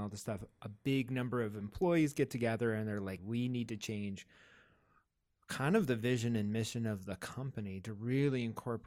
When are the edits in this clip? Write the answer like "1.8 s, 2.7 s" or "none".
3.2 s